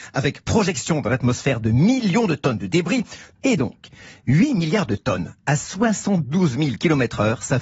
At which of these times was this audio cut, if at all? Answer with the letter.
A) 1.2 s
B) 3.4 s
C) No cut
B